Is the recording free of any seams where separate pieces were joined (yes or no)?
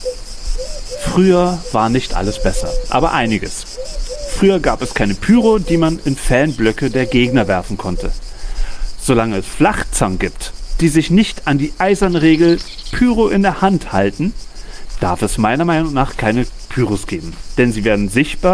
yes